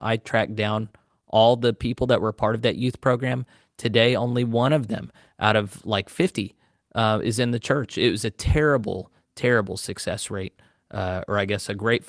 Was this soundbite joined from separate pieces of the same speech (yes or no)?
no